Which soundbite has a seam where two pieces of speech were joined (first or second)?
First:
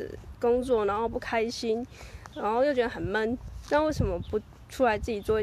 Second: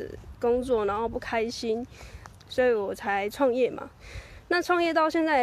second